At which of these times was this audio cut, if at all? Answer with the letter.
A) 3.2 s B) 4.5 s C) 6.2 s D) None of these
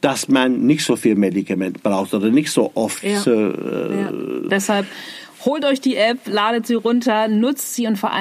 B